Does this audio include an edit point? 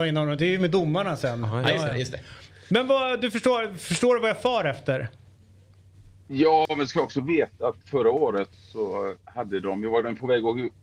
yes; 1 cut; at 8.5 s

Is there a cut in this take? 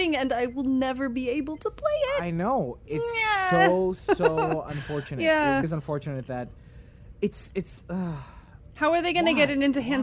yes; 1 cut; at 5.6 s

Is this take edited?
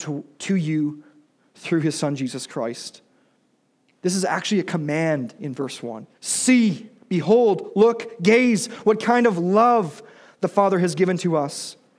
yes; 1 cut; at 6.1 s

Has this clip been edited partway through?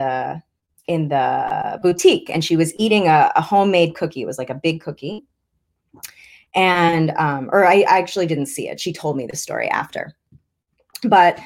no; 0 cuts

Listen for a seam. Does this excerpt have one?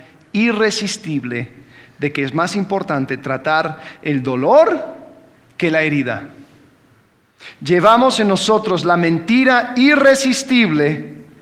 no; 0 cuts

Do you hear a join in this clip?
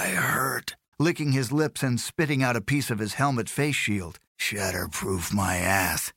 yes; 2 cuts; at 0.9 s, 4.3 s

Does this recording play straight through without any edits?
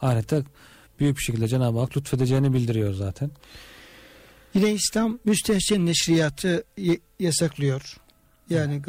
yes; 0 cuts

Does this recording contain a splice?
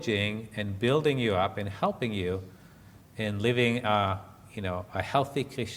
no; 0 cuts

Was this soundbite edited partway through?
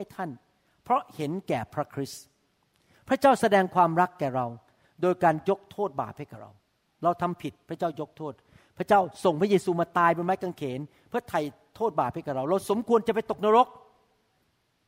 no; 0 cuts

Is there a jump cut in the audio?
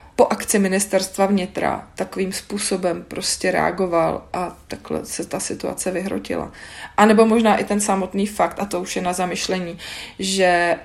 no; 0 cuts

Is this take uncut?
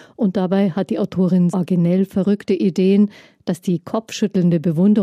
no; 1 cut; at 1.5 s

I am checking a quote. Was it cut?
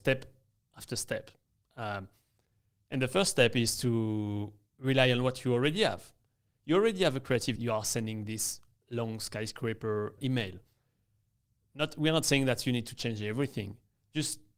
yes; 2 cuts; at 7.6 s, 10.2 s

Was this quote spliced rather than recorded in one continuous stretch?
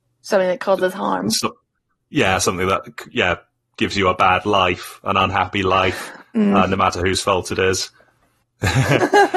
yes; 1 cut; at 8.4 s

